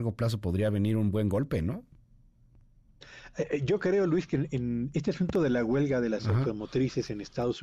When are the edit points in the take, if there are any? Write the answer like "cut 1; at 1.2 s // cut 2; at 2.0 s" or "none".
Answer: none

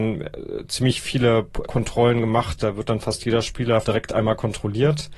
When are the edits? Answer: cut 1; at 1.7 s // cut 2; at 3.8 s

